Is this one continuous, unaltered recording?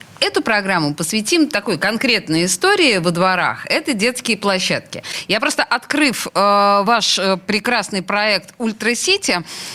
yes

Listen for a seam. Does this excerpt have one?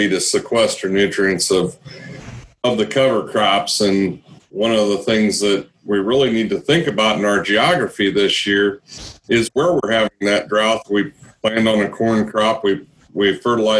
no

